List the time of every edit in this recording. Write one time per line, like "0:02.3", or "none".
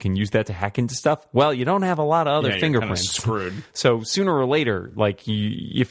none